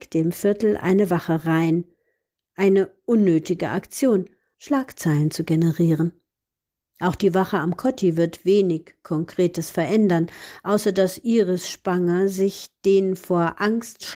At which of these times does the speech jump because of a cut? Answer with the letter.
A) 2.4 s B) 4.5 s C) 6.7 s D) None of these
B